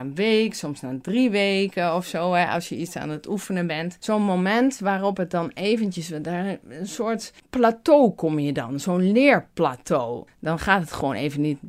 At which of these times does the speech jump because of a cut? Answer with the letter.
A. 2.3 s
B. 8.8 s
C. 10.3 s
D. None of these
C